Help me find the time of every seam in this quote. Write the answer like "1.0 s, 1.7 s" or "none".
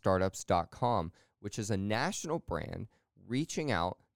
none